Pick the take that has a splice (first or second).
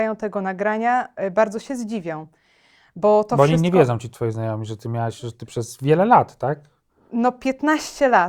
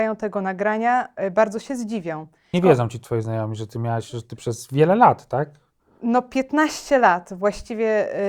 second